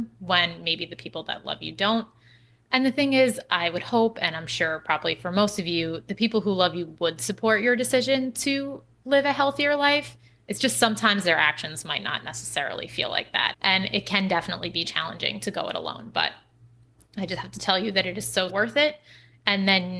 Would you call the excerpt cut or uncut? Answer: cut